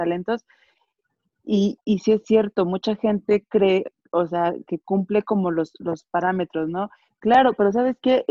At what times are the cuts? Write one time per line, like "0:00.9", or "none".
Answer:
0:07.1

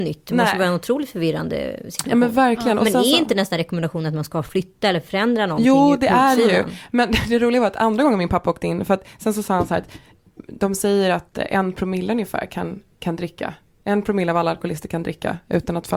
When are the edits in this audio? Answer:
none

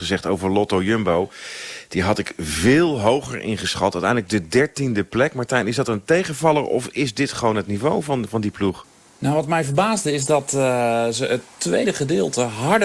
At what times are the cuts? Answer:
none

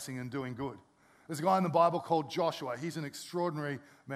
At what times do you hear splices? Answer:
none

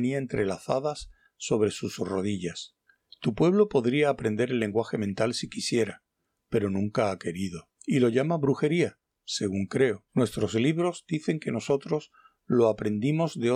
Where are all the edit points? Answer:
0:03.1
0:07.8
0:10.1

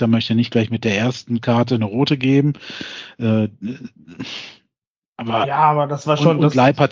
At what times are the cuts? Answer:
none

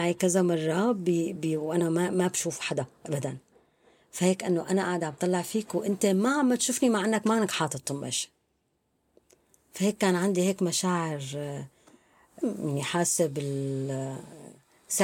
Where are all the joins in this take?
none

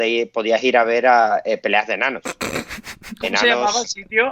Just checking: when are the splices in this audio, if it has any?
none

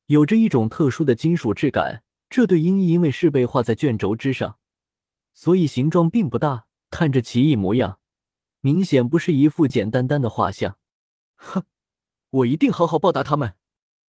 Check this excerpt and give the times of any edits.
0:02.2
0:09.7
0:11.3

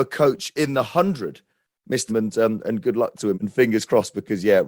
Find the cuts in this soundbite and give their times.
0:02.1
0:03.3

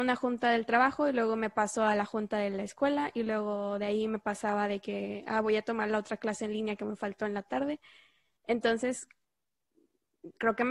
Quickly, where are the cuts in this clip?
none

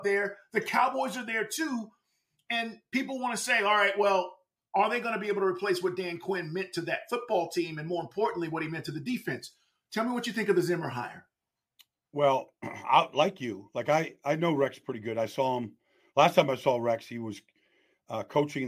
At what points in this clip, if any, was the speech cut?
none

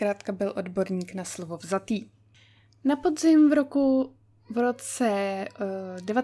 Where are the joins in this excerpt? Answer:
none

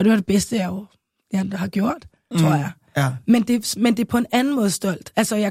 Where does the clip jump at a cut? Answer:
0:02.3

